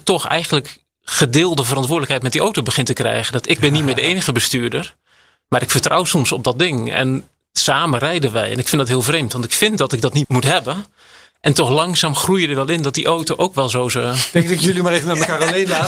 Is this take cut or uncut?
cut